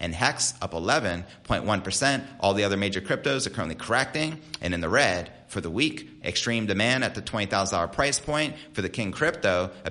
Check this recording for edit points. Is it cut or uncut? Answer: cut